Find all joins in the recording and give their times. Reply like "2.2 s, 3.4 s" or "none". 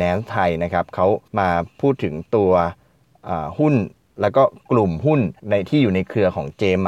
1.3 s, 5.4 s